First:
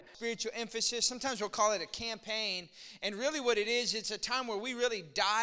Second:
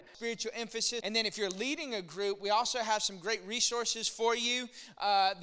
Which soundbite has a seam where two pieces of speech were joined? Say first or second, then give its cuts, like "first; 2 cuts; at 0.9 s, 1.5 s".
second; 1 cut; at 1.0 s